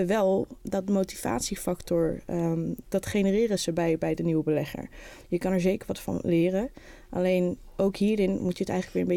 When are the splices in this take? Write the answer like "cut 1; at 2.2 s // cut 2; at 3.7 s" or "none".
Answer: cut 1; at 2.8 s // cut 2; at 5.2 s